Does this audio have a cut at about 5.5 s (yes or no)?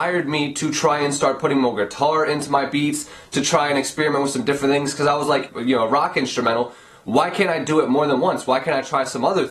yes